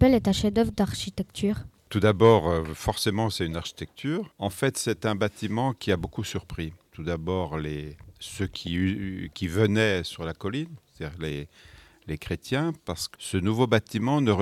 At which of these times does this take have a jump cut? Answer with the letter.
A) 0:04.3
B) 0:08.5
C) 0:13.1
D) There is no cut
C